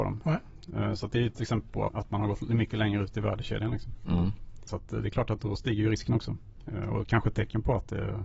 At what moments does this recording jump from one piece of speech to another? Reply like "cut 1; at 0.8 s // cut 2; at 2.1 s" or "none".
cut 1; at 1.9 s